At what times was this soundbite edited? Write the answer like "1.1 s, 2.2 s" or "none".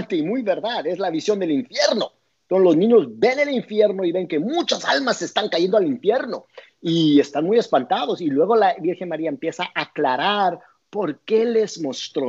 none

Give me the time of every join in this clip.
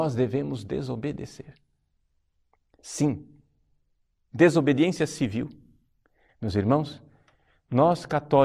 6.3 s

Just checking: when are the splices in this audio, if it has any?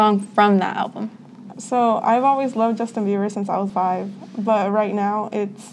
1.5 s, 3.7 s

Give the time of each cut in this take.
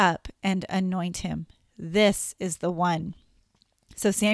none

